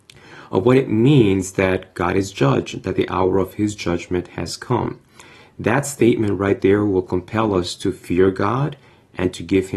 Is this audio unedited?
yes; 0 cuts

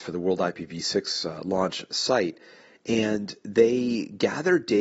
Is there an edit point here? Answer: no; 0 cuts

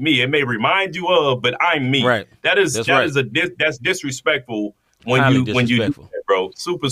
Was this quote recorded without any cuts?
yes; 0 cuts

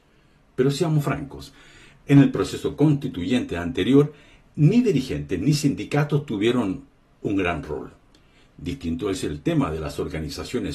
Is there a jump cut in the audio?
no; 0 cuts

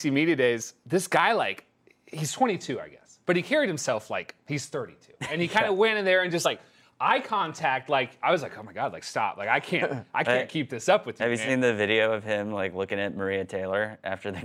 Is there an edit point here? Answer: no; 0 cuts

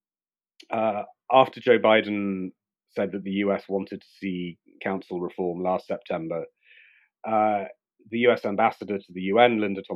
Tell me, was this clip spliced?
no; 0 cuts

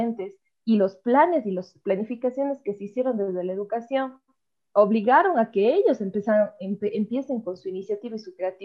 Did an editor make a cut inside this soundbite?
no; 0 cuts

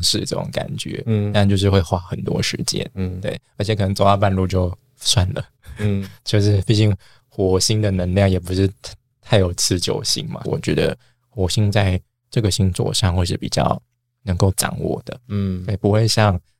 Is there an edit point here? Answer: yes; 1 cut; at 10.4 s

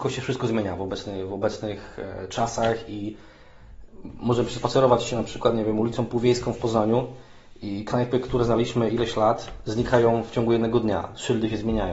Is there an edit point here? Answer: no; 0 cuts

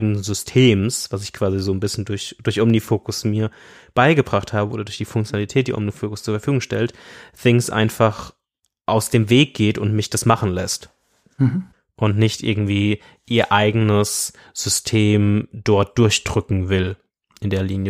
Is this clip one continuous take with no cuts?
yes; 0 cuts

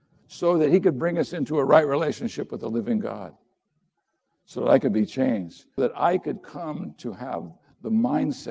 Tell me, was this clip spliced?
yes; 1 cut; at 5.8 s

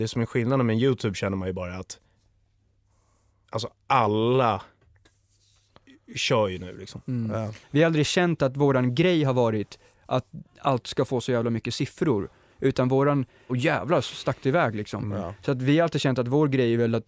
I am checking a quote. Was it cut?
yes; 1 cut; at 13.5 s

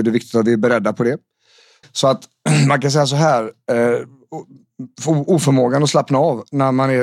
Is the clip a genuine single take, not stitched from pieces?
no; 1 cut; at 1.8 s

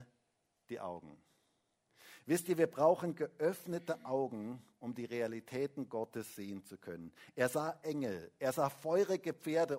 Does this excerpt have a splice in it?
no; 0 cuts

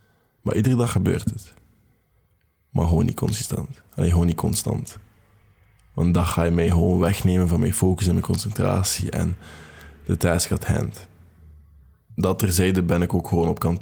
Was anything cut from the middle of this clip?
no; 0 cuts

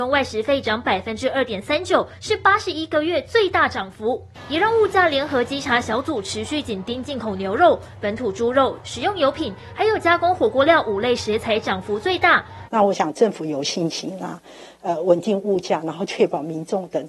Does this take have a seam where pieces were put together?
yes; 2 cuts; at 8.8 s, 12.7 s

